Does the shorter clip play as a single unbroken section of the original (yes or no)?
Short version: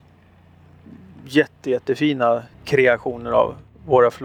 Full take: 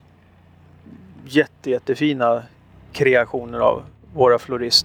no